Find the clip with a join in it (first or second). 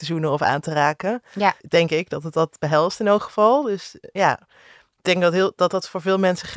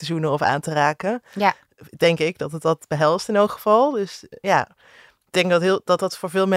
first